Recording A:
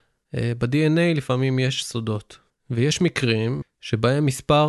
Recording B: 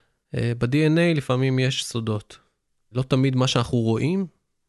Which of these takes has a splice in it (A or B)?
A